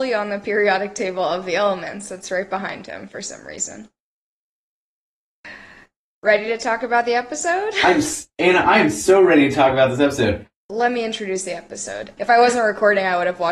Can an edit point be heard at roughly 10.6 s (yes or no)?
yes